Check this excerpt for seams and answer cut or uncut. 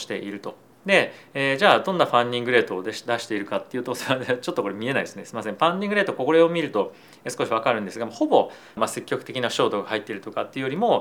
cut